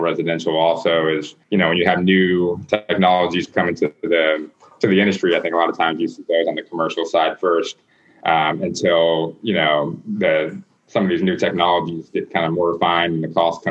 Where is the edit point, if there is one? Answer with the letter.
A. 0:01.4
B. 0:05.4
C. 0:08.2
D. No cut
A